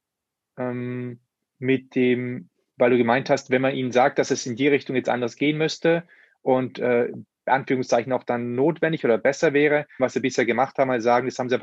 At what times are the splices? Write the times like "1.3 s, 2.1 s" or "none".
10.0 s